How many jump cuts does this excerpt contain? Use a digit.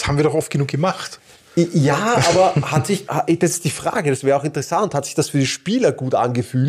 1